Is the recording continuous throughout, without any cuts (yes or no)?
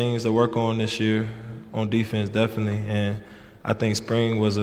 yes